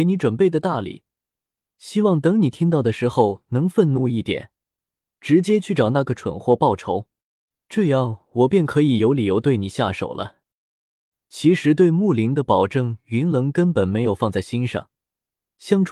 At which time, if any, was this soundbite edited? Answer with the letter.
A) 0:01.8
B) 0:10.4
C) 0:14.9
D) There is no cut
D